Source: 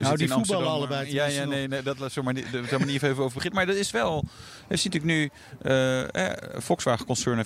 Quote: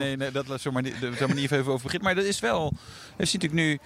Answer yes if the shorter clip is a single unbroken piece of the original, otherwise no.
yes